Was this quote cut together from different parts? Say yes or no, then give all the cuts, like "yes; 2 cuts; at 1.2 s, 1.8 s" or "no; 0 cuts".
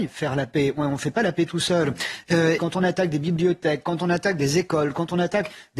yes; 1 cut; at 2.6 s